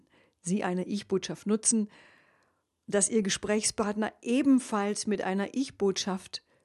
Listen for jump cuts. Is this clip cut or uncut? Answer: uncut